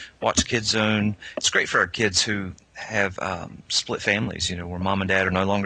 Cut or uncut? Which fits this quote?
uncut